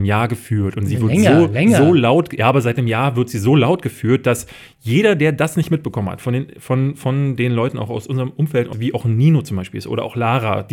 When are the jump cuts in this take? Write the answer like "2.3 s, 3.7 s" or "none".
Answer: 8.7 s